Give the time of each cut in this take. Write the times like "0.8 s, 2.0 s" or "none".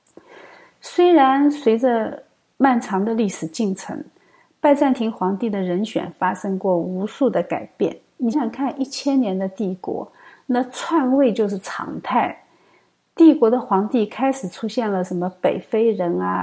8.3 s